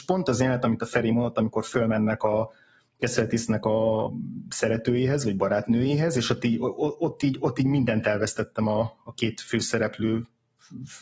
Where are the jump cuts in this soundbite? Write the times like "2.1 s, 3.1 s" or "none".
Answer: 4.1 s